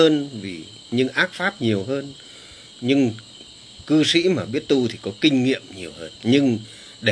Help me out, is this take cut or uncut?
cut